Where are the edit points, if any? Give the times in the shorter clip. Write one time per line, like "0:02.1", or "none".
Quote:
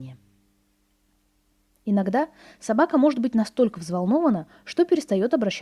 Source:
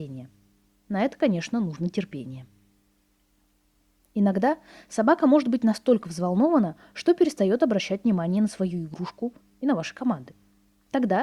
none